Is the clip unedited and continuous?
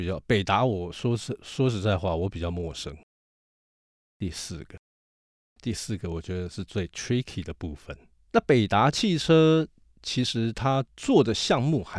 no; 1 cut; at 8.2 s

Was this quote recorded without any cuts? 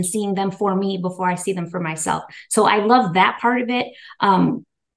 yes; 0 cuts

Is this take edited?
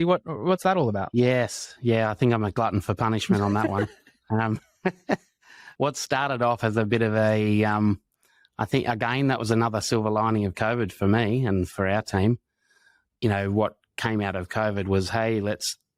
no; 0 cuts

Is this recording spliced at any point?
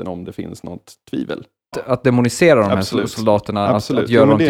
yes; 1 cut; at 1.7 s

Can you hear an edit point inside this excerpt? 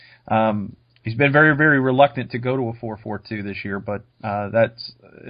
yes; 1 cut; at 4.1 s

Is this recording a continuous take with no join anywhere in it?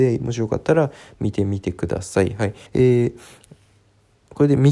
no; 1 cut; at 2.7 s

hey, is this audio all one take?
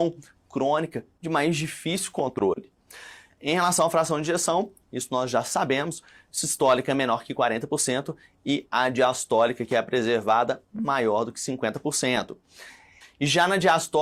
no; 1 cut; at 13.0 s

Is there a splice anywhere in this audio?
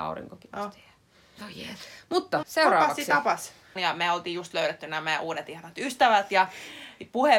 yes; 2 cuts; at 2.4 s, 3.8 s

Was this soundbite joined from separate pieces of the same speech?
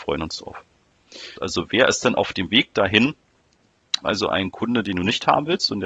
yes; 2 cuts; at 1.4 s, 4.0 s

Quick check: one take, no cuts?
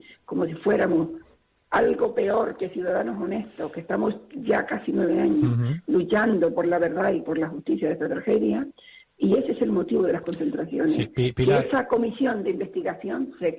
yes; 0 cuts

